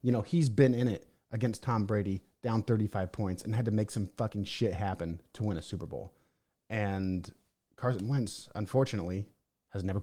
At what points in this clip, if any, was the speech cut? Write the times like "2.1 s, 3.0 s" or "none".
none